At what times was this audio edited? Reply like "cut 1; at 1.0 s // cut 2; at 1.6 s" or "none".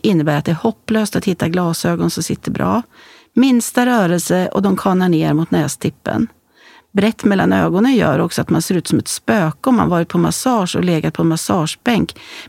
none